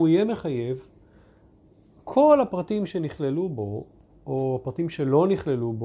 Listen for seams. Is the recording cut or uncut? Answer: uncut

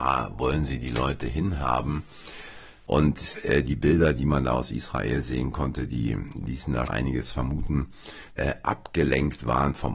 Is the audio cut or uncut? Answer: cut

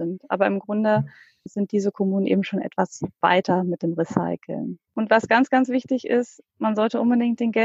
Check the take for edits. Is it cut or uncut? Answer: uncut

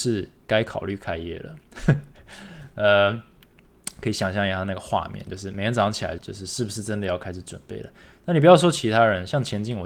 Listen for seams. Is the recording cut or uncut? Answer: cut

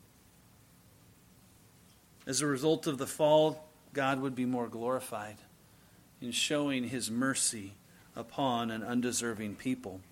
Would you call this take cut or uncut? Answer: uncut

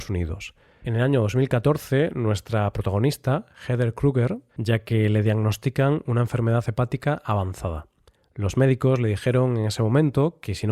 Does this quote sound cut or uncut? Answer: cut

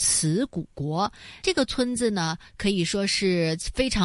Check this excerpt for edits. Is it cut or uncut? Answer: cut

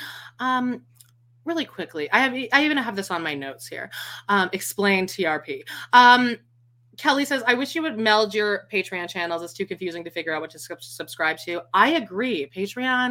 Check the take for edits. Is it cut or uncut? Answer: uncut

